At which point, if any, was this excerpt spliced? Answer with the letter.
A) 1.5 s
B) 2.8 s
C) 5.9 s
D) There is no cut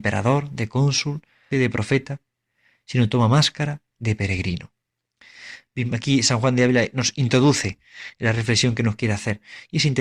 A